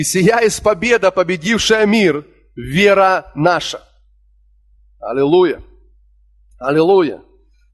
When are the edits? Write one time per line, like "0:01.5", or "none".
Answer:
none